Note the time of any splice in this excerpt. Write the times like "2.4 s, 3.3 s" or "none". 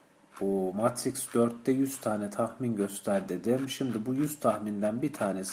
none